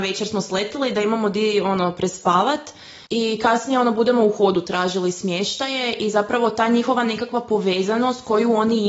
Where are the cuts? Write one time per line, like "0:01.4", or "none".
0:03.1

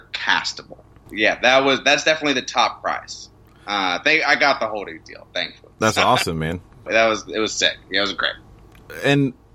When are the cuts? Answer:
0:01.1
0:06.9

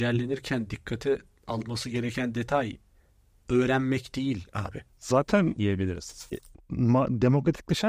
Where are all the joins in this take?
0:04.9

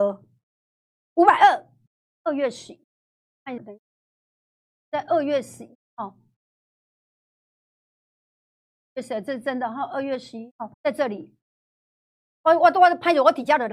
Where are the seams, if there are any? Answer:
0:03.6
0:10.7

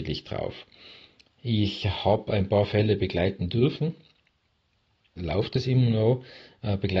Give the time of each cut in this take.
0:05.2

